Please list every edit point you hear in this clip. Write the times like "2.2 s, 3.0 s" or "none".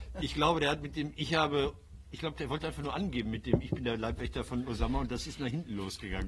none